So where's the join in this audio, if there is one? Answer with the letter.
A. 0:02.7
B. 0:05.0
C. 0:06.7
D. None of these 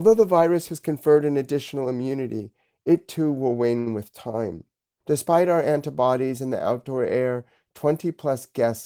B